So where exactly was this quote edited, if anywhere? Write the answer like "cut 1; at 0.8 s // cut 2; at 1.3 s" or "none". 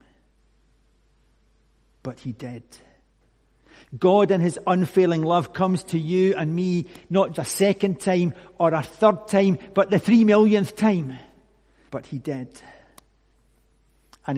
cut 1; at 7.3 s // cut 2; at 11.9 s